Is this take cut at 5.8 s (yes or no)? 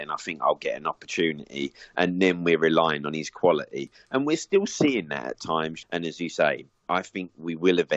yes